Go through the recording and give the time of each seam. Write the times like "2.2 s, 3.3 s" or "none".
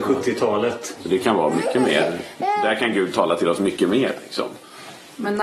1.0 s